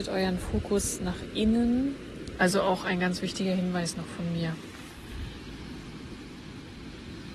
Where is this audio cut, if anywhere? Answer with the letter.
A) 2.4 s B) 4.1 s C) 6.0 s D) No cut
A